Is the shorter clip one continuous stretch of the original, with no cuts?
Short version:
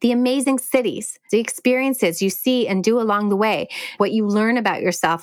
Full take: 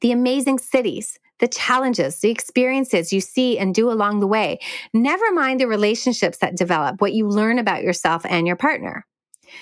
no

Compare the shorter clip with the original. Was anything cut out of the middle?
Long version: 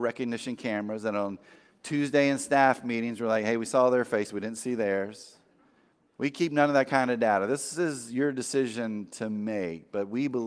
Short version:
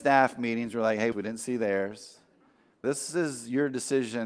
yes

